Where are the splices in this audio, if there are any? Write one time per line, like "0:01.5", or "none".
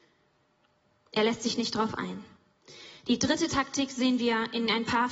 none